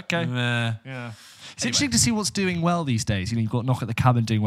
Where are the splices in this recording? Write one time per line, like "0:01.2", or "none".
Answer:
none

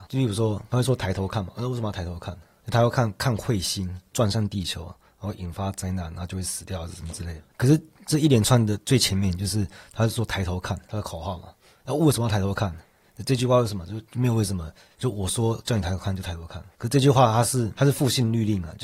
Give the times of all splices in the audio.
none

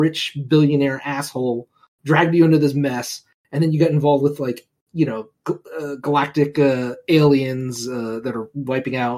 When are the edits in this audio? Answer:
none

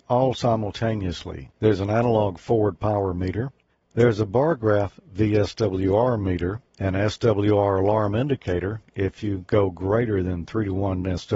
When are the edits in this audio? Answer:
none

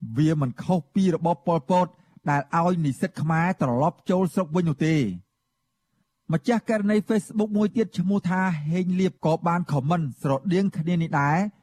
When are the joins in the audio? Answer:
0:09.2

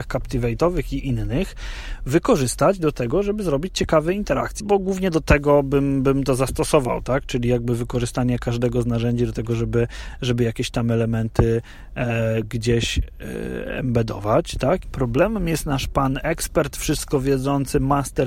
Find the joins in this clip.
0:04.6
0:14.8

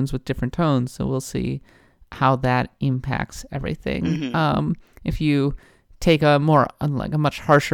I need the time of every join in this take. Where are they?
none

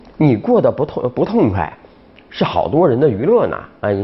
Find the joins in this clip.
none

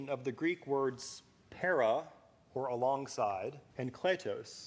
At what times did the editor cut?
0:03.7

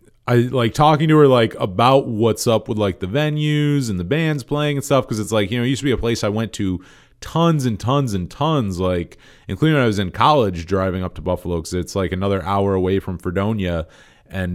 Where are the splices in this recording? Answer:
none

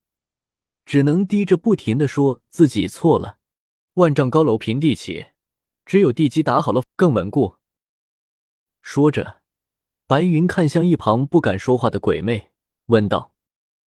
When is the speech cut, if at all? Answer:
0:03.9
0:06.8

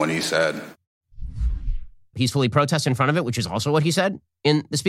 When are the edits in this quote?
0:02.1

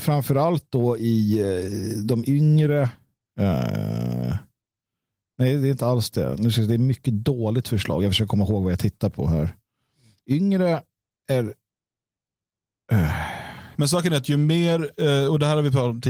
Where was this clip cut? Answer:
0:13.8

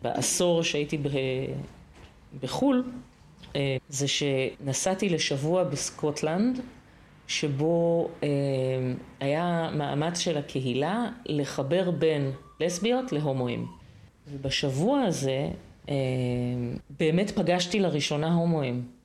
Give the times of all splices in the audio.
0:03.8

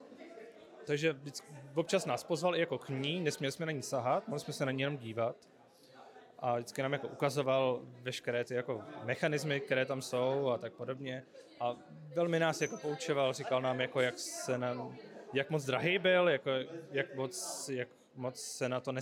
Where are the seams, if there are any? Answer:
none

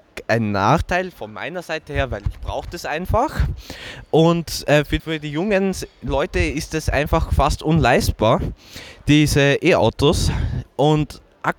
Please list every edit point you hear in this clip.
0:05.0
0:10.6

